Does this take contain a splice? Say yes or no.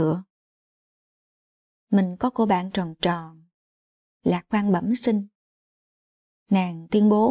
yes